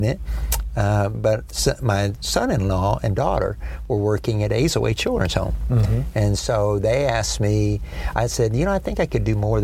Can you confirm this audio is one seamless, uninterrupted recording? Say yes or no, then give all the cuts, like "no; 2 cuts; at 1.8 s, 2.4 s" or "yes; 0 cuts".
yes; 0 cuts